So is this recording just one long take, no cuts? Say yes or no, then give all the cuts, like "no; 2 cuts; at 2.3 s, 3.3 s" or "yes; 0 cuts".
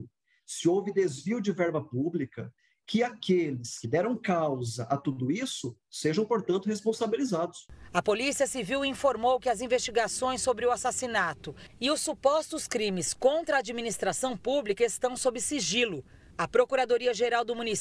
yes; 0 cuts